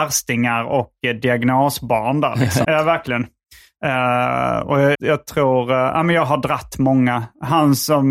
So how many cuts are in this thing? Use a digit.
2